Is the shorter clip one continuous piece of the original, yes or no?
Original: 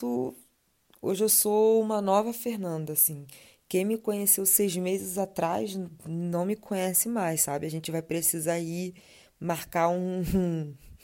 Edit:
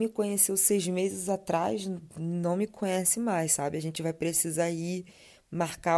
yes